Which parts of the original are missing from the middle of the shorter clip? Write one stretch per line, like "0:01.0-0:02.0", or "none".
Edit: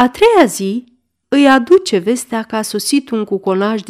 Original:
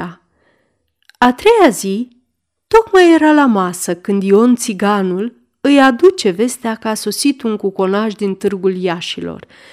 0:02.5-0:05.6

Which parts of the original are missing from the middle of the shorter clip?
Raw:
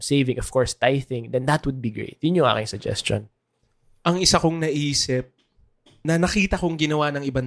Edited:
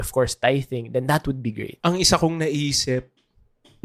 0:02.2-0:04.0

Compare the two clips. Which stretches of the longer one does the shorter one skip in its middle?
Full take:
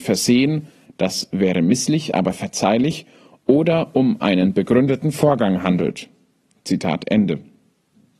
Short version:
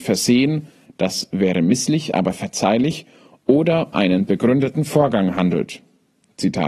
0:03.9-0:04.2

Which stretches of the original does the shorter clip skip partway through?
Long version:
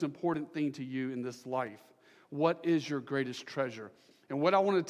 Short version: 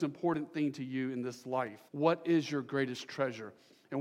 0:01.9-0:02.3

